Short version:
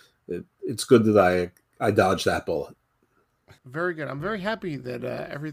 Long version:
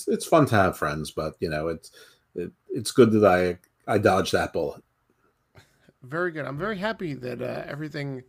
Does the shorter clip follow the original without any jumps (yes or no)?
no